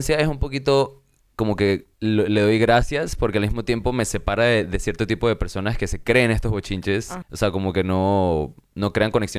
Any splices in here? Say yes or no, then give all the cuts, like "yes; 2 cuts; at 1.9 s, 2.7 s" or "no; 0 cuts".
yes; 2 cuts; at 1.9 s, 7.2 s